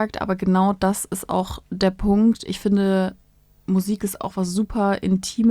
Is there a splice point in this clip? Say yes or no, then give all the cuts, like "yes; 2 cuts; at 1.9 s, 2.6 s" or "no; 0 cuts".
no; 0 cuts